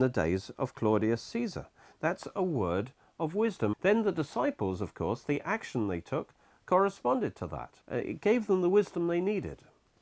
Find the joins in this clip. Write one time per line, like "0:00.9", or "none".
0:03.7
0:07.8